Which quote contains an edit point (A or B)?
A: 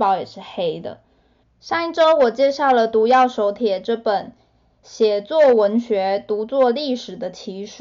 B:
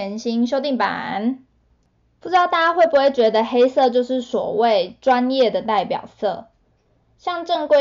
A